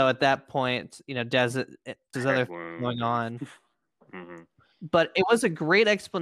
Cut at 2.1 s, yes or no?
yes